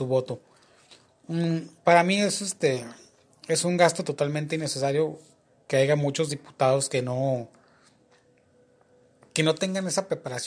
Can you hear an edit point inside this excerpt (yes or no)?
no